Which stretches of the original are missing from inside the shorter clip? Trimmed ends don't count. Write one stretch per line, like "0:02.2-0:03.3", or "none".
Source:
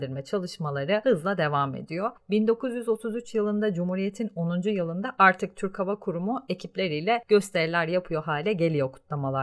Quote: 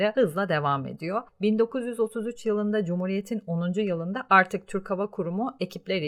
none